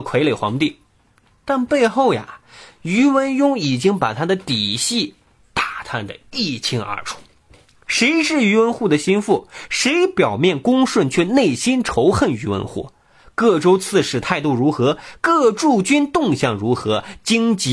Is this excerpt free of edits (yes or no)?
no